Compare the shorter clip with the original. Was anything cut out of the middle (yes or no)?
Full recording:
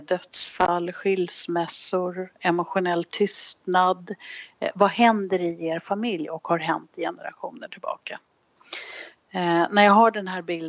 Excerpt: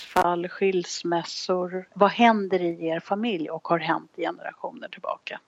yes